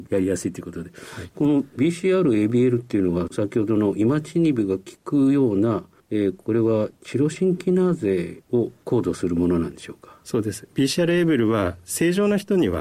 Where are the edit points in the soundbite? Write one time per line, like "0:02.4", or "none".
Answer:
0:01.3